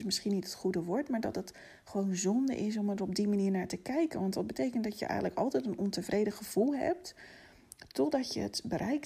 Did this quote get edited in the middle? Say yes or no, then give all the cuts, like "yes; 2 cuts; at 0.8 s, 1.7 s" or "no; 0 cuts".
no; 0 cuts